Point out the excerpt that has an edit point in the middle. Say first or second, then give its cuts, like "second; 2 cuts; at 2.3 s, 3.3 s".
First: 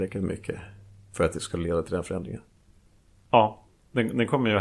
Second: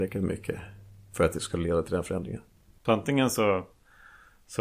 second; 1 cut; at 2.8 s